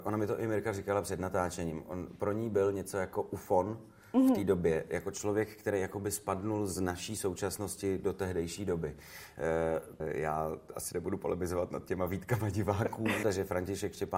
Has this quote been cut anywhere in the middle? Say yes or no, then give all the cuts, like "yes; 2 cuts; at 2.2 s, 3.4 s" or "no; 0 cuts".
yes; 2 cuts; at 10.0 s, 13.2 s